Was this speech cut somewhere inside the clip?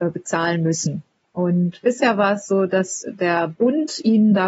no; 0 cuts

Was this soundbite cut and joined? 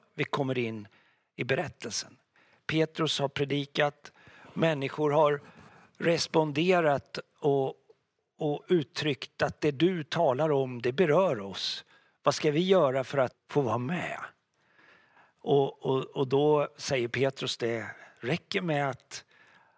yes; 1 cut; at 13.3 s

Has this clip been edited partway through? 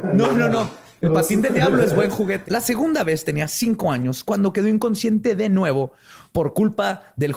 yes; 1 cut; at 2.5 s

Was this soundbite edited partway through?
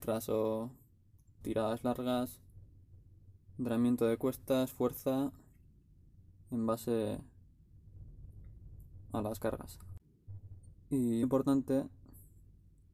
yes; 2 cuts; at 1.4 s, 11.2 s

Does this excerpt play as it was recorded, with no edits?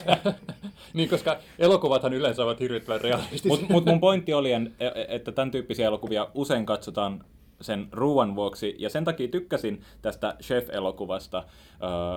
yes; 0 cuts

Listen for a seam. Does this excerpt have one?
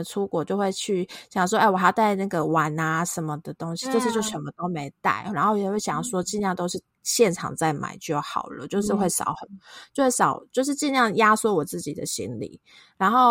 no; 0 cuts

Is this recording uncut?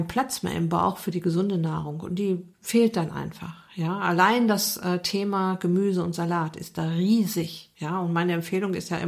yes; 0 cuts

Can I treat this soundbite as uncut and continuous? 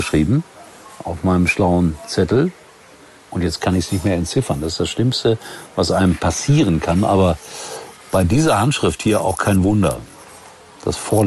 yes; 0 cuts

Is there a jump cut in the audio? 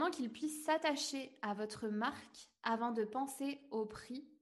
no; 0 cuts

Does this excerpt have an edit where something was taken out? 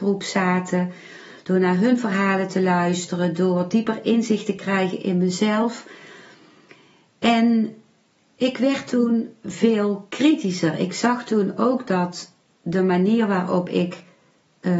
no; 0 cuts

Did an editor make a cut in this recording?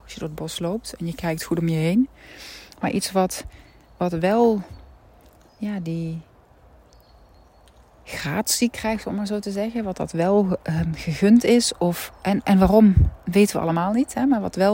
no; 0 cuts

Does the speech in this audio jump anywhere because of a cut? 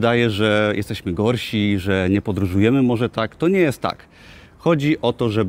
no; 0 cuts

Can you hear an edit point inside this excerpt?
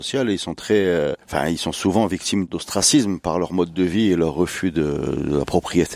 no; 0 cuts

